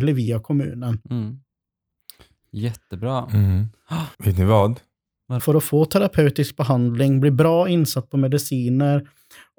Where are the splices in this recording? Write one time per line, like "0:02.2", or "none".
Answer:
0:01.0
0:04.1
0:05.4

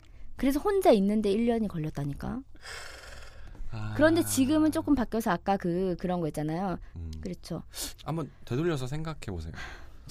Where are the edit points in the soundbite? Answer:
0:06.9
0:07.9

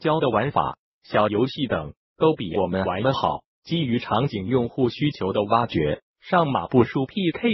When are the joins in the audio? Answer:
0:00.9
0:06.1

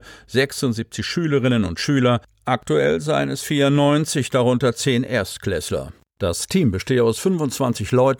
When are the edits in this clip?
none

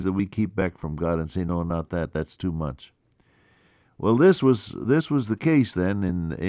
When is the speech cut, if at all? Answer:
none

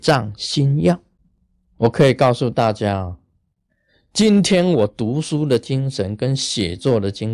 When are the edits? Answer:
none

